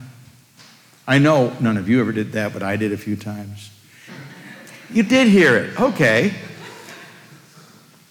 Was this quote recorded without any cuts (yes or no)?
no